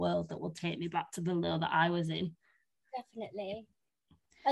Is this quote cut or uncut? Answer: cut